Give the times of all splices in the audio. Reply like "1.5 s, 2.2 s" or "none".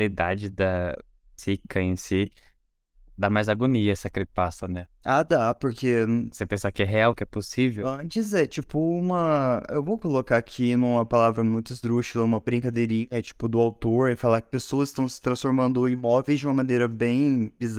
none